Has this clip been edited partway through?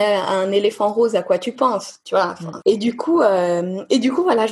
yes; 1 cut; at 2.6 s

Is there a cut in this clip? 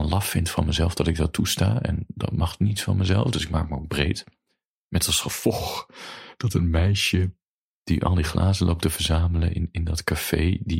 no; 0 cuts

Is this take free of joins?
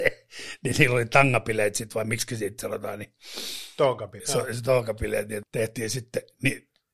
no; 2 cuts; at 4.2 s, 5.4 s

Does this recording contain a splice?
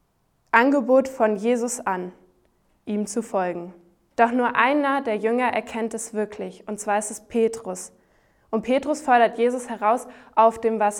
yes; 1 cut; at 4.1 s

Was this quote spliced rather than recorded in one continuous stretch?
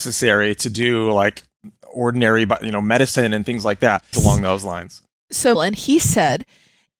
yes; 2 cuts; at 4.1 s, 5.5 s

